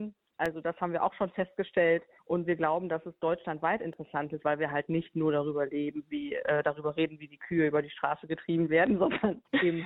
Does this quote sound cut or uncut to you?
uncut